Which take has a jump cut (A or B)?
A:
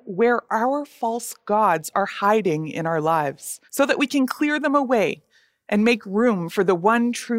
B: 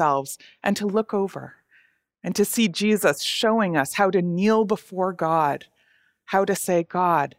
A